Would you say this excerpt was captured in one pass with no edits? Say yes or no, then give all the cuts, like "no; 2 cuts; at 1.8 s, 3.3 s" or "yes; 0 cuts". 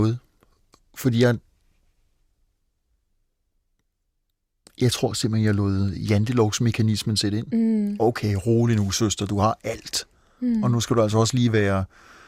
yes; 0 cuts